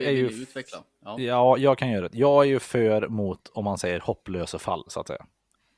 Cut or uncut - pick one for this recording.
uncut